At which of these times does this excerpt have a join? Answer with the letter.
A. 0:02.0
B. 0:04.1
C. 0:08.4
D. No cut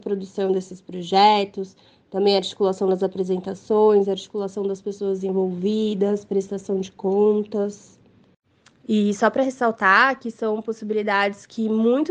D